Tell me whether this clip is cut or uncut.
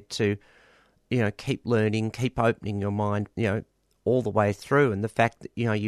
cut